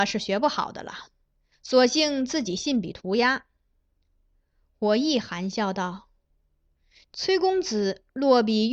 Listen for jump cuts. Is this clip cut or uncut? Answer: uncut